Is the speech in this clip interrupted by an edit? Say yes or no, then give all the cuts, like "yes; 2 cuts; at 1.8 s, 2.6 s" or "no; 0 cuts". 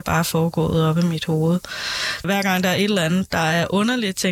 yes; 1 cut; at 2.2 s